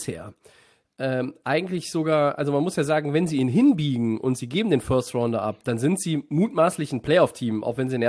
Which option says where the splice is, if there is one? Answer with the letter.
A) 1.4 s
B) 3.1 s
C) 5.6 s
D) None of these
D